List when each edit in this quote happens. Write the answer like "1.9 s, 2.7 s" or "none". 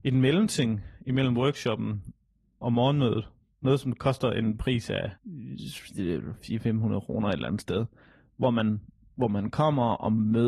5.2 s